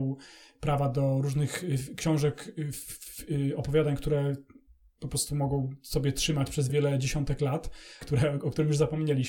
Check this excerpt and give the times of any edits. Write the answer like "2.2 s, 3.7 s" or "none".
6.7 s, 8.0 s